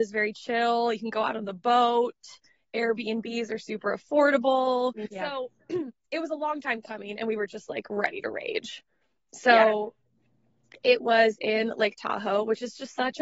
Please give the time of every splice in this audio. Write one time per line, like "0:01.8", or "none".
0:05.1